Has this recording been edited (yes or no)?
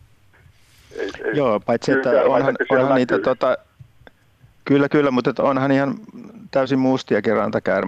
no